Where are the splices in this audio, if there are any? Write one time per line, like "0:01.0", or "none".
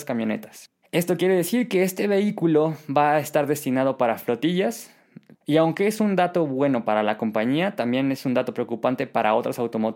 0:05.3